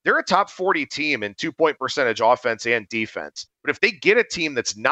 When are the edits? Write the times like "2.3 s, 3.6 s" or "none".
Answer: 3.5 s

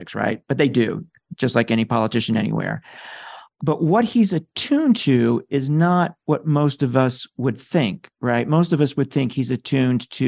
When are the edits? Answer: none

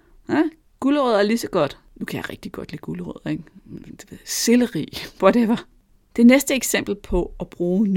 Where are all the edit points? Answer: none

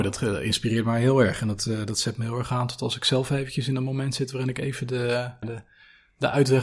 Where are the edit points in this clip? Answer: 5.4 s

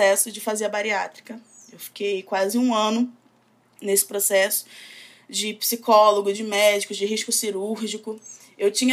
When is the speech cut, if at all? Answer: none

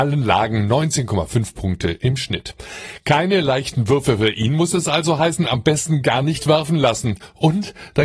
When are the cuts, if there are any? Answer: none

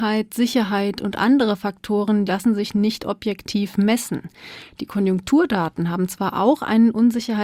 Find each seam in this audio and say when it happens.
2.3 s

